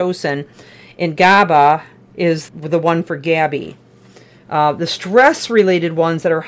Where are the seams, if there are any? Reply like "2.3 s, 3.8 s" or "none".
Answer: 2.5 s